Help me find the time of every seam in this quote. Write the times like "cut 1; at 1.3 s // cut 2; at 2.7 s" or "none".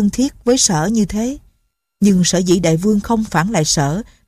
cut 1; at 2.0 s